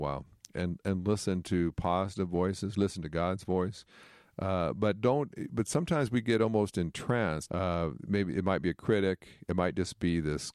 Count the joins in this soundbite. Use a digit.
1